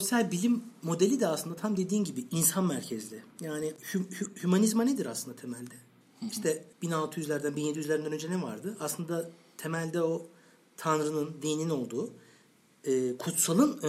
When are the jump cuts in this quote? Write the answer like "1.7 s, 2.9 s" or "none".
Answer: 6.7 s